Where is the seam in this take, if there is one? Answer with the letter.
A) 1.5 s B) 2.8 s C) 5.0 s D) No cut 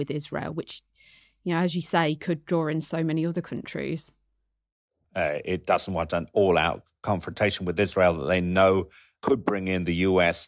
C